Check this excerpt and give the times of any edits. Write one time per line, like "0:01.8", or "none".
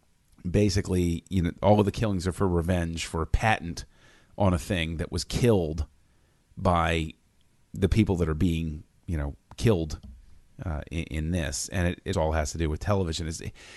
0:12.1